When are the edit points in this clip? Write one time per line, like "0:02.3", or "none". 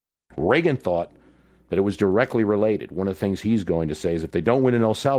none